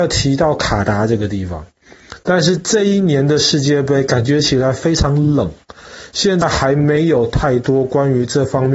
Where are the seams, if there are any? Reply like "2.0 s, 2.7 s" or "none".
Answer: none